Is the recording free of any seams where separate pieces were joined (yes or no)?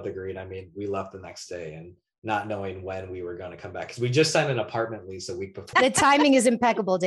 no